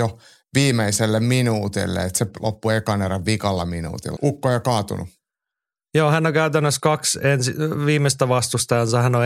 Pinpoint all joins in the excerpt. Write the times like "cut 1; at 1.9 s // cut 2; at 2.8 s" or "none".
cut 1; at 4.2 s